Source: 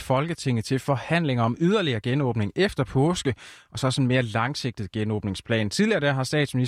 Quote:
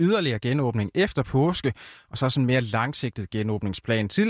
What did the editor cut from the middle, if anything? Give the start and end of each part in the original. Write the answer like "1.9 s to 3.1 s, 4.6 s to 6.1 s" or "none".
none